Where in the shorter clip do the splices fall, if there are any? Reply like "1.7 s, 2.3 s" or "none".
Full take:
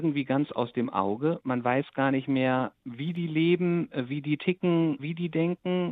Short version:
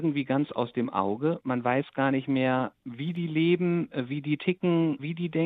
none